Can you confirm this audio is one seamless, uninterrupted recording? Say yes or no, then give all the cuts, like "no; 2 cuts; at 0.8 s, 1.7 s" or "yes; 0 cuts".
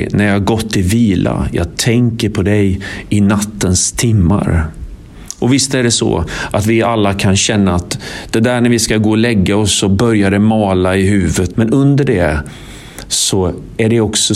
no; 1 cut; at 11.5 s